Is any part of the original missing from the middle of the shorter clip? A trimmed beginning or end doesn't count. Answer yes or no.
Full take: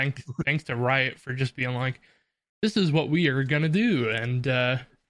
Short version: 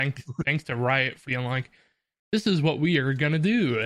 yes